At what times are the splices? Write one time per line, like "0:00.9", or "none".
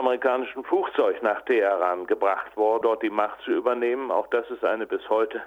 0:02.8